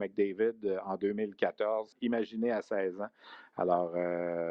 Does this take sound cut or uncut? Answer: cut